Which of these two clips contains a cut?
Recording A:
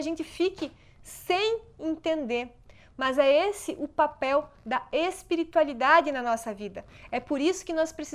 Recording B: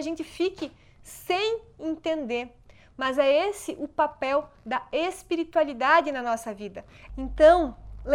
B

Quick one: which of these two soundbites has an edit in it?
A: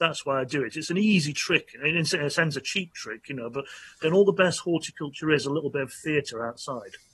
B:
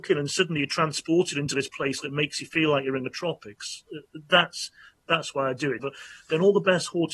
B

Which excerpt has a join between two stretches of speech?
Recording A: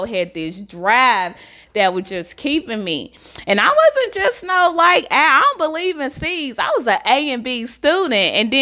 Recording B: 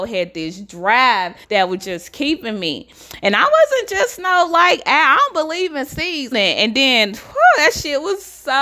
B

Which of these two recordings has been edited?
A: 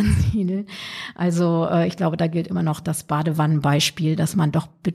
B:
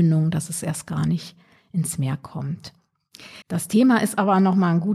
B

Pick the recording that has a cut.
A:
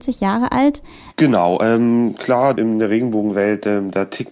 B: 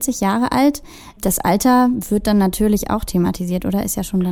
A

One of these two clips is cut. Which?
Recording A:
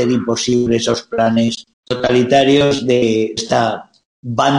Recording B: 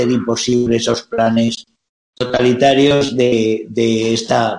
A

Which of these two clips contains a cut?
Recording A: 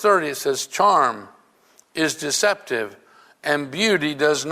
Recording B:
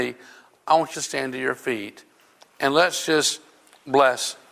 B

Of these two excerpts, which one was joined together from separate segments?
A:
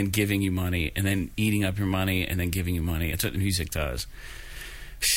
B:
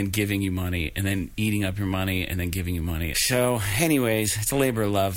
B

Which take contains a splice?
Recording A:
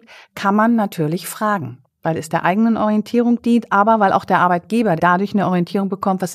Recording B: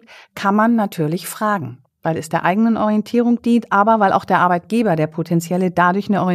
A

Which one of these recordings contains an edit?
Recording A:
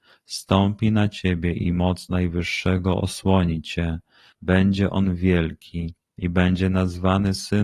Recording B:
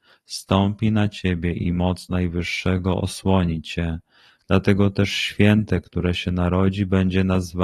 A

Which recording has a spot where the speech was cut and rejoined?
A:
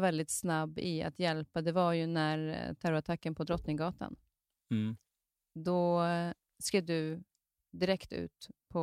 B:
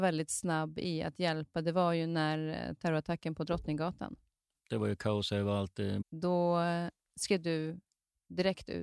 B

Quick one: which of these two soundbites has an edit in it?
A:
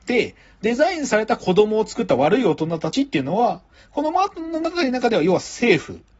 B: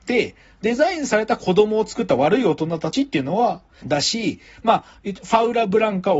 B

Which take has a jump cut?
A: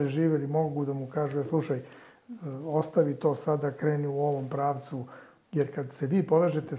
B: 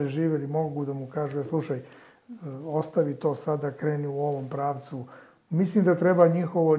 A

